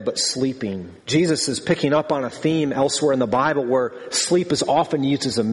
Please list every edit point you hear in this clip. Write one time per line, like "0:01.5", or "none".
0:01.0

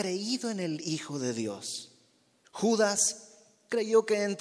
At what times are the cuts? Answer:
0:02.4

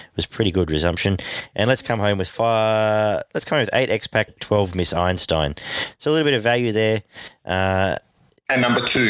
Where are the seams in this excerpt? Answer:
0:04.3

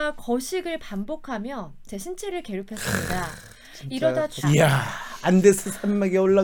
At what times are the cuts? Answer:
0:04.4

